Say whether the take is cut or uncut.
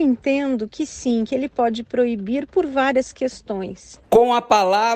cut